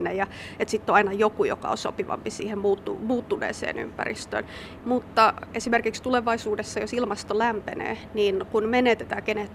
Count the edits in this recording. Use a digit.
1